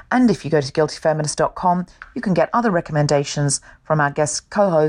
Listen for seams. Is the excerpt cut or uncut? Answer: uncut